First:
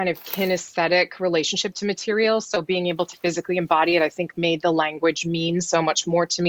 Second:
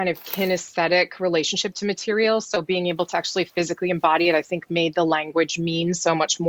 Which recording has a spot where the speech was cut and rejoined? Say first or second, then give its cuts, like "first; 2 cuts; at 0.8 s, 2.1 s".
first; 1 cut; at 3.1 s